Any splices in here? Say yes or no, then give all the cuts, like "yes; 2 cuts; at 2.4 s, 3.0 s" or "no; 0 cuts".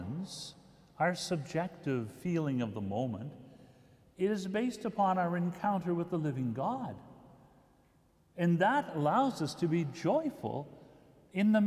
no; 0 cuts